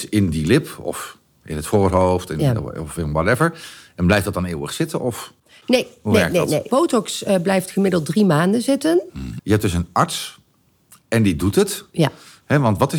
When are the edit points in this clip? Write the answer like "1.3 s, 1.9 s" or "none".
6.7 s, 9.4 s